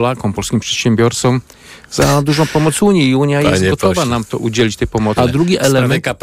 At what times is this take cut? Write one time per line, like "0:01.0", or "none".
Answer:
0:05.2

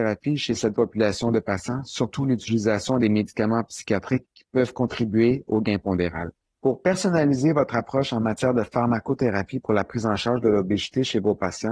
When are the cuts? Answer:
0:06.4

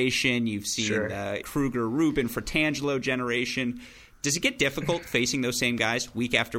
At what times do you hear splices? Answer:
0:01.4

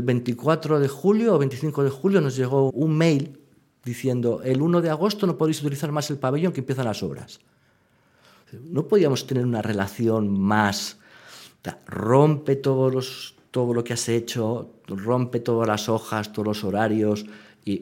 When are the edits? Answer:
0:02.7

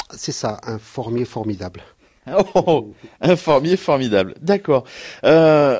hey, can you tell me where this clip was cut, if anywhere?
none

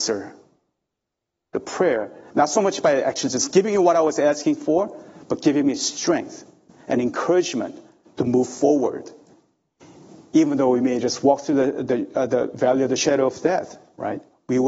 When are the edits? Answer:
none

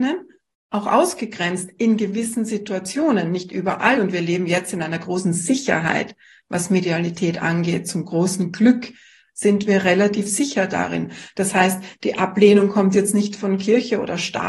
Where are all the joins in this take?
none

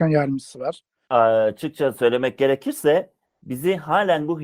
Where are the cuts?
0:01.1

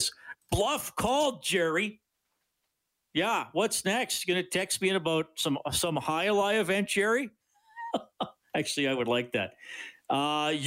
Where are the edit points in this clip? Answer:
none

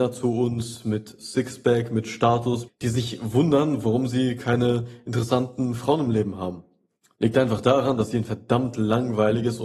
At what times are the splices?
0:02.7

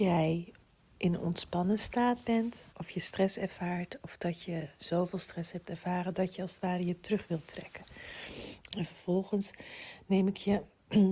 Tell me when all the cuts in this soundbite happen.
0:02.7
0:08.7

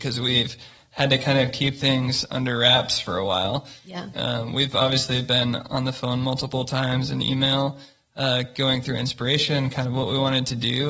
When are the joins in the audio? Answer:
0:04.1

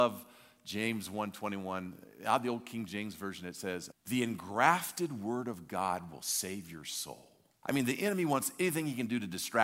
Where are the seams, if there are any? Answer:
0:03.9
0:07.6

